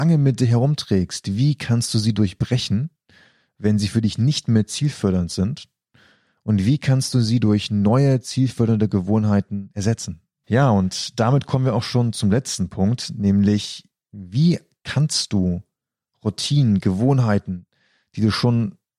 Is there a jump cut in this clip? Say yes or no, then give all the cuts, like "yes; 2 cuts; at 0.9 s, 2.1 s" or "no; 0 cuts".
yes; 1 cut; at 10.4 s